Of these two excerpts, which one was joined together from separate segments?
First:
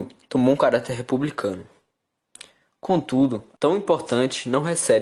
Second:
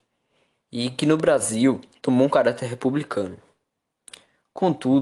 first; 1 cut; at 3.6 s

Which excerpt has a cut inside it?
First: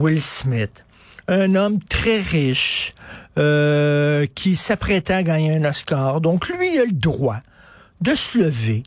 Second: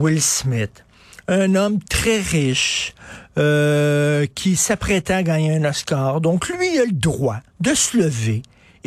second; 1 cut; at 7.5 s

